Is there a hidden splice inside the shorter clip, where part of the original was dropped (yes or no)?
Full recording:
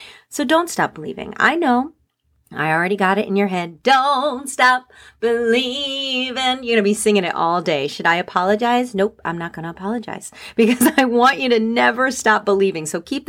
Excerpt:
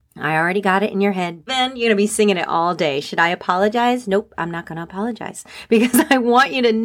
yes